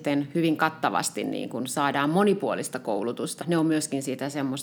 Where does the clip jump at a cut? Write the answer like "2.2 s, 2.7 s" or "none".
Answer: 3.4 s